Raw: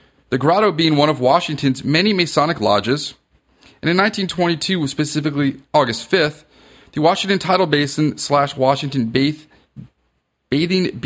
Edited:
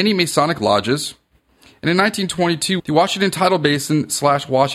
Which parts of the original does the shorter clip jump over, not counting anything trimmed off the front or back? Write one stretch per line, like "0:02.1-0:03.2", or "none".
0:04.8-0:06.9